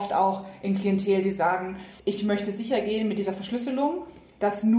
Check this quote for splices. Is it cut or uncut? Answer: cut